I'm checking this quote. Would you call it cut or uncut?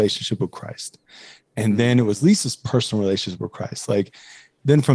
uncut